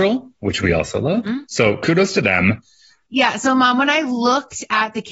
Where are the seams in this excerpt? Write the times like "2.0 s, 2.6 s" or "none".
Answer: 1.5 s, 3.1 s